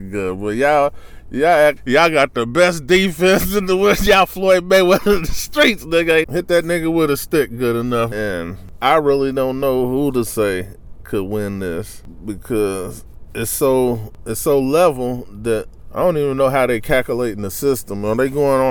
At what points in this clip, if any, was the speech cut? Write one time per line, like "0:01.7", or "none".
0:01.8
0:06.2
0:08.1